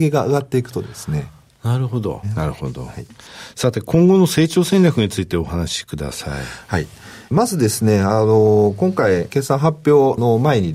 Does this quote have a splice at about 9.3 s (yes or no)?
yes